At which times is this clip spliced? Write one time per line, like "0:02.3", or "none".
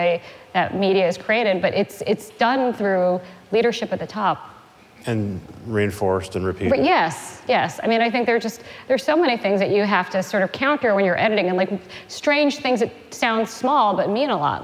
none

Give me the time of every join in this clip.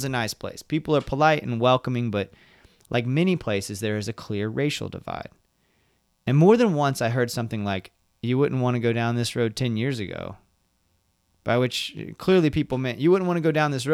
none

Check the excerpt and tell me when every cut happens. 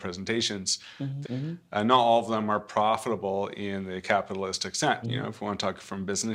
0:01.2
0:05.0

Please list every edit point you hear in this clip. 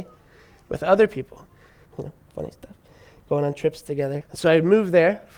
0:01.9
0:04.2

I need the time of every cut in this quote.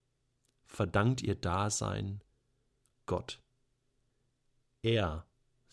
none

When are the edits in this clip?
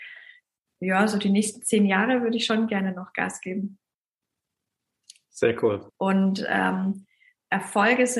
0:05.9

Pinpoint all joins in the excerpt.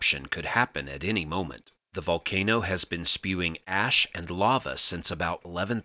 0:01.9

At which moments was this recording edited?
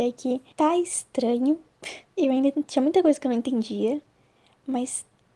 0:02.1

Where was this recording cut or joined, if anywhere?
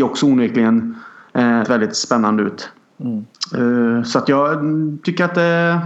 0:01.6

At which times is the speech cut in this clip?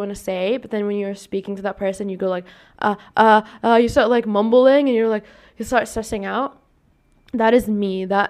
none

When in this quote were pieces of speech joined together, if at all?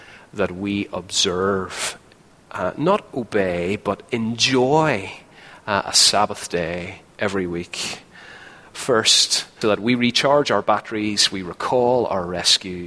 0:09.6

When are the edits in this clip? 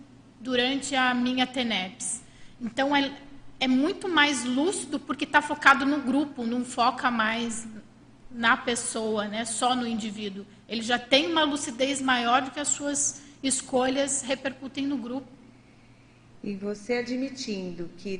none

